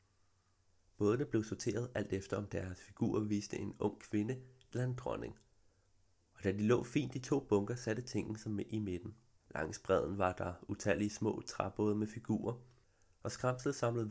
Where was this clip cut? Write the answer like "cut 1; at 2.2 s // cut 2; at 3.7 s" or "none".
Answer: cut 1; at 9.4 s

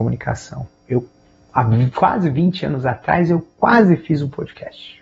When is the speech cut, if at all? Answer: none

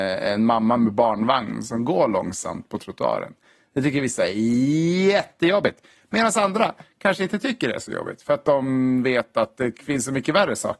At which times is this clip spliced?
none

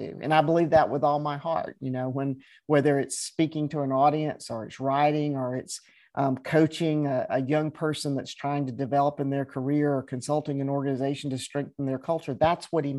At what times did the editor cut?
none

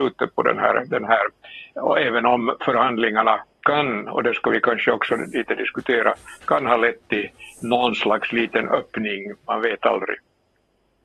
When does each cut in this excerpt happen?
cut 1; at 3.5 s

